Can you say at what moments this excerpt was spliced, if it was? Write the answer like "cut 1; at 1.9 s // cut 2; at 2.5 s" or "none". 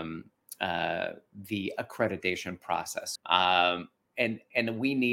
cut 1; at 3.2 s

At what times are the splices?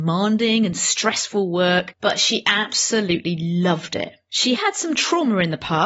cut 1; at 4.6 s

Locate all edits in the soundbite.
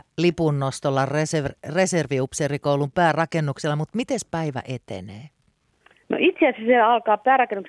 none

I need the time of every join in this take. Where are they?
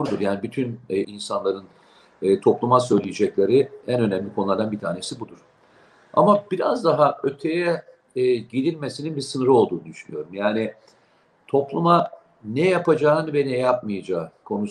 cut 1; at 1.0 s

